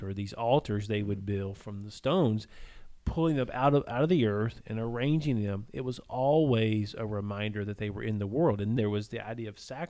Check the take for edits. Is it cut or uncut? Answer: cut